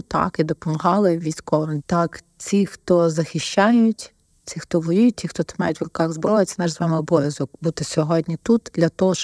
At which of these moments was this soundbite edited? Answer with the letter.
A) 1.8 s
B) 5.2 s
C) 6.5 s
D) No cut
A